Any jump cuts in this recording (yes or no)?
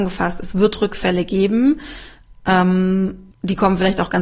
yes